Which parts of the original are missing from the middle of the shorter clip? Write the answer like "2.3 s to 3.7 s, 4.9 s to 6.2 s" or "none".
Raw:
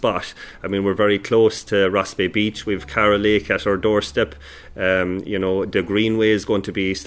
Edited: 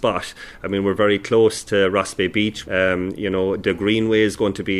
2.6 s to 4.7 s